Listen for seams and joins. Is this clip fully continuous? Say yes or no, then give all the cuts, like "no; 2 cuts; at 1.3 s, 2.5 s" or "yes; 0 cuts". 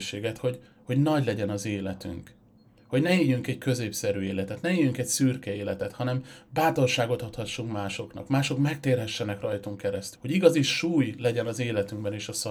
no; 1 cut; at 10.1 s